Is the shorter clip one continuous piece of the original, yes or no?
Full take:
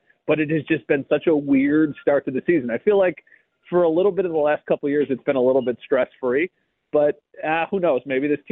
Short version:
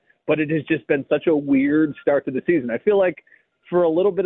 yes